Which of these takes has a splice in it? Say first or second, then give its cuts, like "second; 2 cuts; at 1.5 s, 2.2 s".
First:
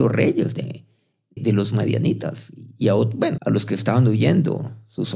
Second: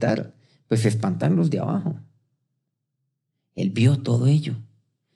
first; 2 cuts; at 1.4 s, 3.4 s